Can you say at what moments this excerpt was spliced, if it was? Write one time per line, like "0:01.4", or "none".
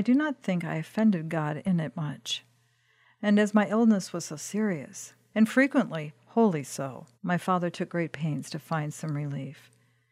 0:05.3
0:07.1